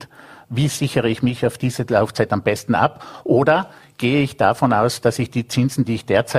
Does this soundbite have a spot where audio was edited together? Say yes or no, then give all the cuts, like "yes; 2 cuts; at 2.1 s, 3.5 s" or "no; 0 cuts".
no; 0 cuts